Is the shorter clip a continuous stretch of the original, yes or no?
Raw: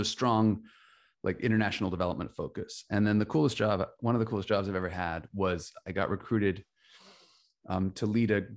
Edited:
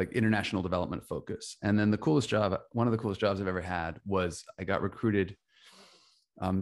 yes